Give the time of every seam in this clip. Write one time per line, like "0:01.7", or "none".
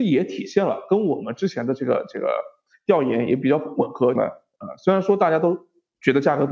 0:04.2